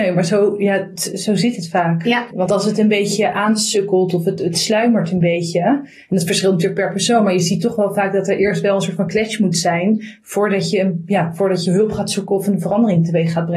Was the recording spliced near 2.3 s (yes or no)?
yes